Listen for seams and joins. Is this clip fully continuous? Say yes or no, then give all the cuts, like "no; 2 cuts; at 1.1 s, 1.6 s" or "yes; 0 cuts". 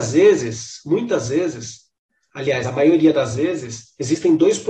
yes; 0 cuts